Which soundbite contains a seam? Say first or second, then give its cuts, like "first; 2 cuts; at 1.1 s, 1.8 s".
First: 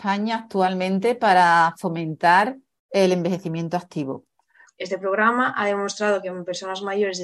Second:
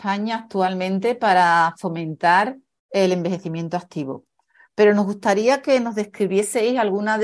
first; 1 cut; at 4.7 s